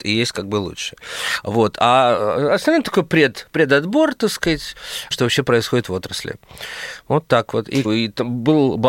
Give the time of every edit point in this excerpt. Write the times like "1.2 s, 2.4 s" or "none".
5.1 s, 7.8 s